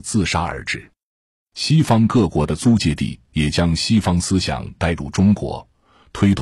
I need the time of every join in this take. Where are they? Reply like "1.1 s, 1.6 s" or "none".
none

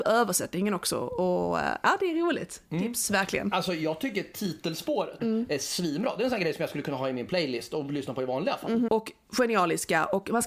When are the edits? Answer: 5.2 s, 8.9 s

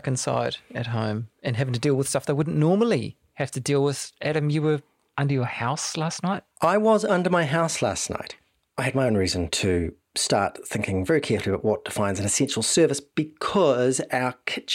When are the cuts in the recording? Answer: none

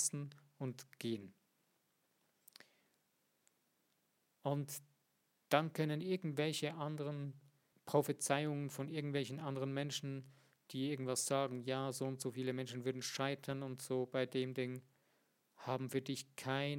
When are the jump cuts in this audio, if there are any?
7.7 s

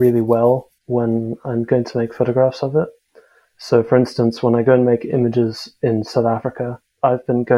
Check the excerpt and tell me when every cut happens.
none

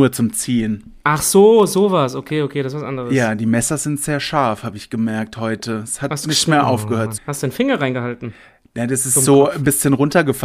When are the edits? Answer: 7.2 s

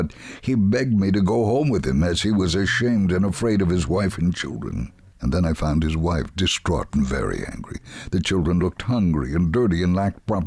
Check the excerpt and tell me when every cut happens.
5.1 s

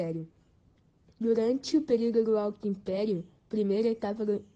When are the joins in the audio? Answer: none

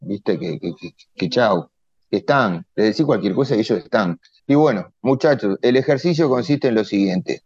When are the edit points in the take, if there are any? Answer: 4.4 s

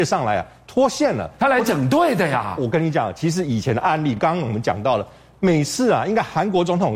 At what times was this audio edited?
none

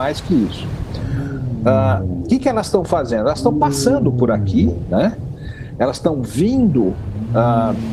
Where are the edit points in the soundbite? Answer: none

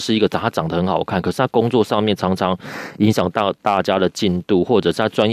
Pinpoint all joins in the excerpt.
none

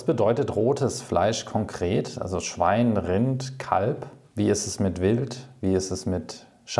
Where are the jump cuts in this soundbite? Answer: none

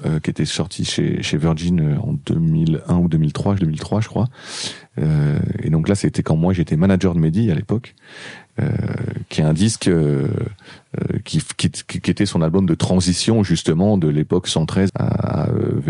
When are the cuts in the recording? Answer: 3.6 s, 14.9 s

